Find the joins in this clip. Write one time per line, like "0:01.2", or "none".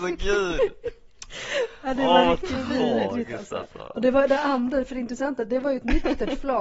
none